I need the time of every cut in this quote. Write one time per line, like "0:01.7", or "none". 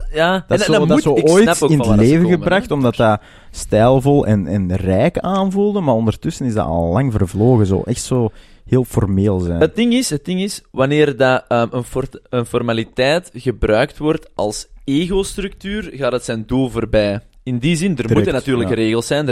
none